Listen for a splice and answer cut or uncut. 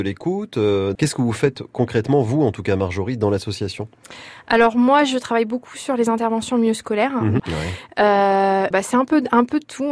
cut